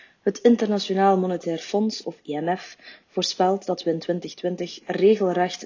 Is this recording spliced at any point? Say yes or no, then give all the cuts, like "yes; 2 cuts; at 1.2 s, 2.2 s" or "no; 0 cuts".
no; 0 cuts